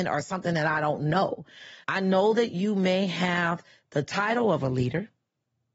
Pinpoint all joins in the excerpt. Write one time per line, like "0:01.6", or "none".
0:01.8